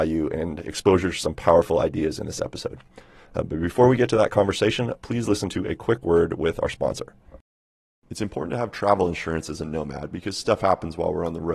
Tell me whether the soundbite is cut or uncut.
uncut